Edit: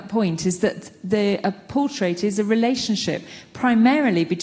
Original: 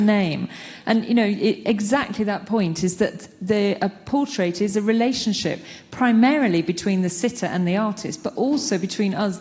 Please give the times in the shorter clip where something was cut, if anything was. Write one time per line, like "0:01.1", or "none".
none